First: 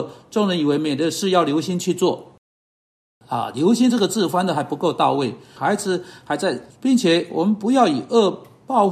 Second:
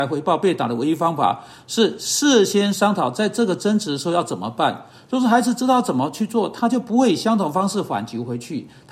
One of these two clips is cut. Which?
first; 2 cuts; at 5.6 s, 6.7 s

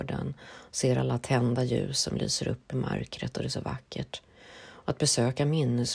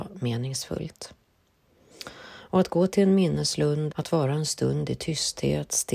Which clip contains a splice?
second; 1 cut; at 3.9 s

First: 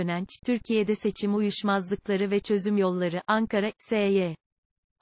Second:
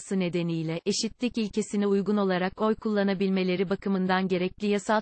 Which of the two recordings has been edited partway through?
first; 1 cut; at 3.7 s

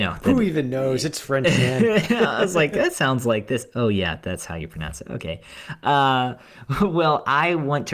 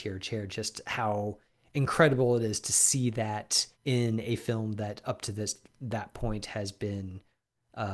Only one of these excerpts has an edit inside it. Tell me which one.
second; 1 cut; at 3.7 s

